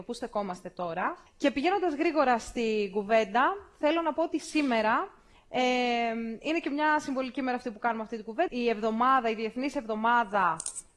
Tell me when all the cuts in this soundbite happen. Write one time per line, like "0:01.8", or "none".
0:01.3
0:08.5